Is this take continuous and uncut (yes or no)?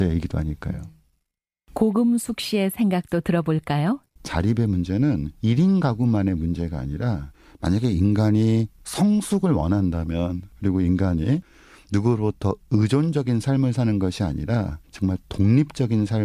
no